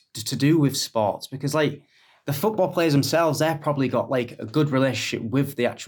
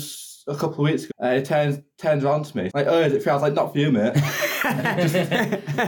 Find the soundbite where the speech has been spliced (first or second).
second